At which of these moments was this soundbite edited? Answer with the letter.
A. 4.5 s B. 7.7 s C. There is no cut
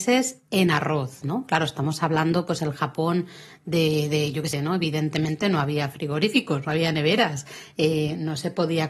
A